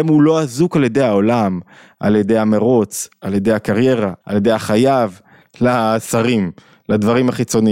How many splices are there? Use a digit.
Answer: 2